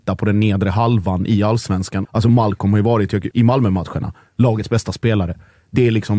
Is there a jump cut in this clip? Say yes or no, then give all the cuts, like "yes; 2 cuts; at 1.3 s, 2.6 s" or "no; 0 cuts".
yes; 2 cuts; at 2.0 s, 3.3 s